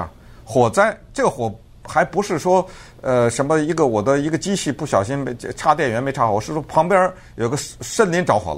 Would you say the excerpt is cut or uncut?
uncut